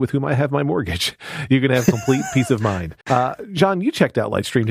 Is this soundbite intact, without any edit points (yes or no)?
no